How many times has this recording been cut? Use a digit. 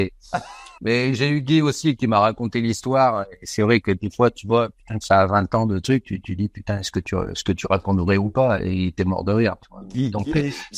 1